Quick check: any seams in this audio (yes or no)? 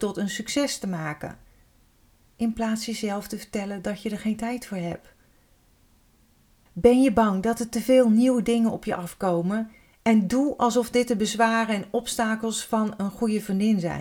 yes